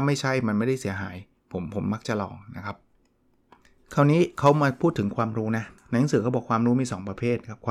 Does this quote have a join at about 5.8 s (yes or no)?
yes